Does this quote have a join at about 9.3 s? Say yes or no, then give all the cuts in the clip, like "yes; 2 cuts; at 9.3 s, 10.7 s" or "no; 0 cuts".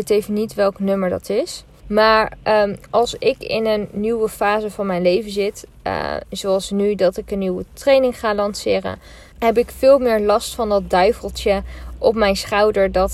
yes; 2 cuts; at 1.8 s, 9.3 s